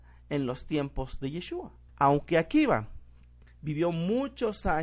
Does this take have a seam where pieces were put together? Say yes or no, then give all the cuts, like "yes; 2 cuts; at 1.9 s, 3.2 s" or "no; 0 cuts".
yes; 1 cut; at 1.9 s